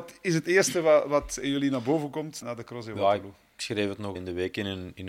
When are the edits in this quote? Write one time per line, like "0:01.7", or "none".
0:02.4
0:04.2

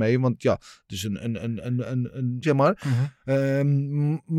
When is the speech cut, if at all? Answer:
0:02.4

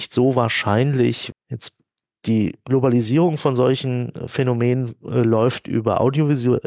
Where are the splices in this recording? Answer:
0:01.3

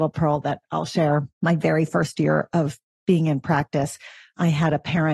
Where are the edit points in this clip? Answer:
0:01.3

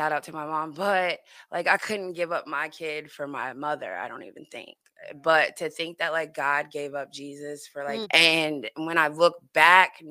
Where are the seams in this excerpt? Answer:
0:08.0

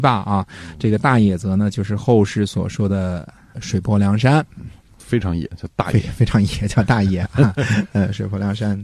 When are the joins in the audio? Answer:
none

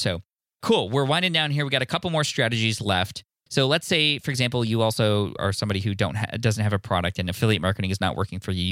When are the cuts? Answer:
0:03.5
0:05.4

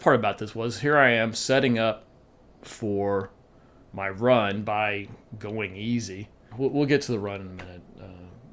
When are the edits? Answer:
0:06.5

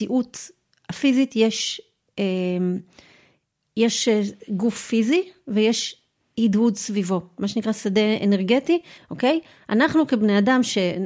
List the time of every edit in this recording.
0:09.0

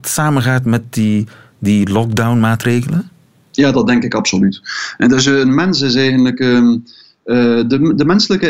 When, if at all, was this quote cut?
none

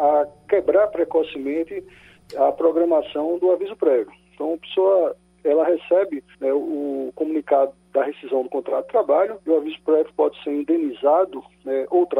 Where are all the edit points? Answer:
0:06.3
0:09.4

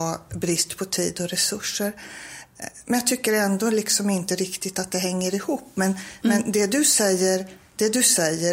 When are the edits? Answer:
none

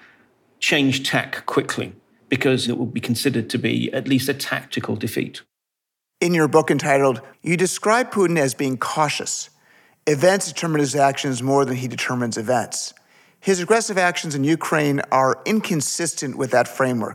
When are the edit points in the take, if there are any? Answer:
0:07.3

